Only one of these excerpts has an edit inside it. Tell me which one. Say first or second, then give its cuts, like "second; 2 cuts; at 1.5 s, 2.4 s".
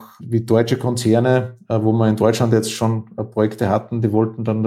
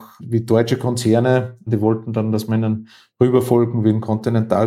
second; 1 cut; at 1.7 s